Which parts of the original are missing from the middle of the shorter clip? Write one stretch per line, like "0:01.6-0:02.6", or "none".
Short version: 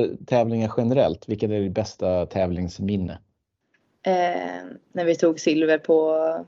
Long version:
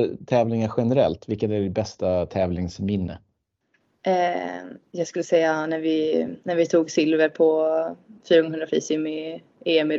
0:04.9-0:06.4